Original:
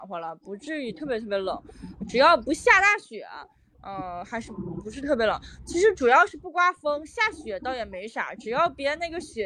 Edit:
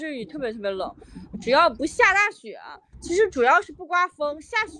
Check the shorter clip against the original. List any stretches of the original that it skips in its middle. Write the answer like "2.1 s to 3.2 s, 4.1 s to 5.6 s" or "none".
3.6 s to 5.6 s

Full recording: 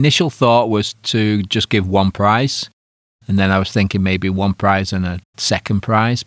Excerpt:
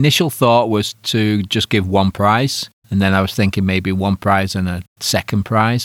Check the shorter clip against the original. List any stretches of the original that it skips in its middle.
2.8 s to 3.1 s

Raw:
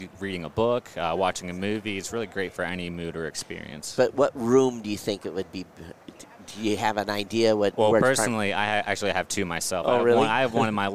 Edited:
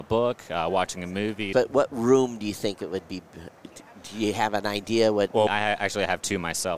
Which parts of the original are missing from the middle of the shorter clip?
2.0 s to 4.0 s, 7.9 s to 8.5 s

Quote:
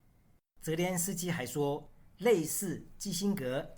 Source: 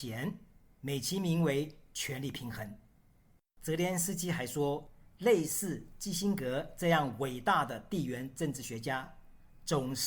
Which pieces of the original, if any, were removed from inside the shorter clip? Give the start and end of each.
none

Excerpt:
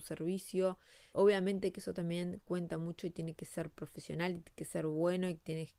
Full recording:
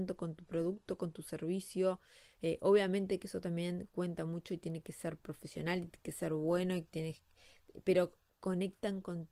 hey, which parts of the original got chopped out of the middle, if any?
2.3 s to 2.6 s

